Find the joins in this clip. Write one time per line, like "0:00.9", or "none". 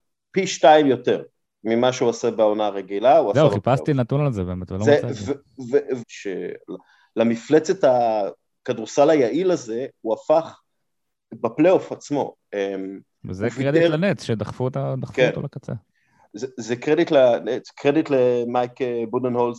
0:06.0